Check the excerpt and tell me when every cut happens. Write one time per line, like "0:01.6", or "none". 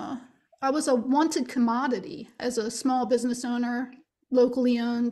0:02.4